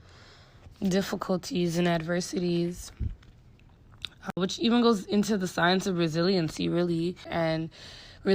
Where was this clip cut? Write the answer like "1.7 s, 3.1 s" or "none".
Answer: 7.3 s